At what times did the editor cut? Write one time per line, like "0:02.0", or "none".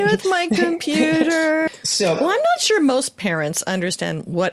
0:01.7